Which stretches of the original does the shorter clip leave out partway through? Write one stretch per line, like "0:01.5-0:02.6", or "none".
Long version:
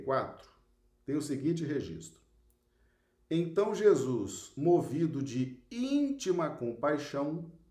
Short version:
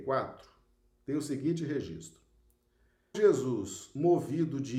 0:03.1-0:03.8